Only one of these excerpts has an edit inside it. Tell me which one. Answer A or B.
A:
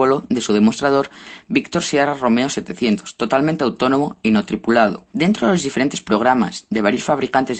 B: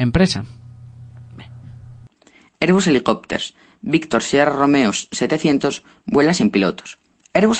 A